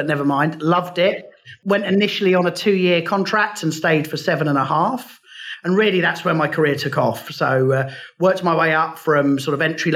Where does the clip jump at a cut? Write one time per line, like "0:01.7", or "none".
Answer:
none